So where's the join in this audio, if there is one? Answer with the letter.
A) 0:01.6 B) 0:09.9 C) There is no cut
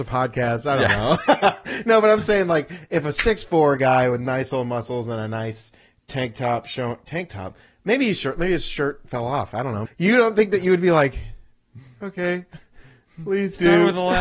B